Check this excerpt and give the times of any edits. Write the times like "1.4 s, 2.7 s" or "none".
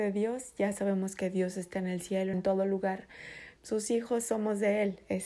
2.3 s, 3.6 s